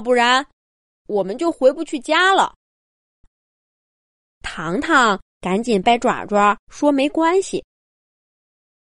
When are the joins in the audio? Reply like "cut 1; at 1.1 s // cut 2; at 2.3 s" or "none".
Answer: cut 1; at 3.2 s // cut 2; at 5.8 s